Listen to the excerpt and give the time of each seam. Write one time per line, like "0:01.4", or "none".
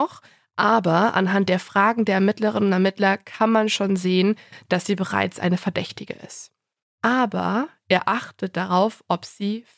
0:06.8